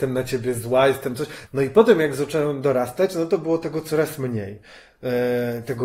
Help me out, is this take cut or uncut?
cut